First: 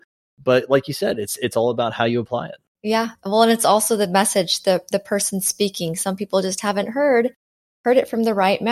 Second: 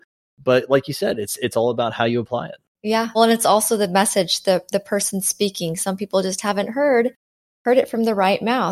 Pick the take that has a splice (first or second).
second